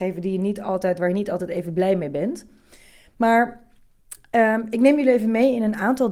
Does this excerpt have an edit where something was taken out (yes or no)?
no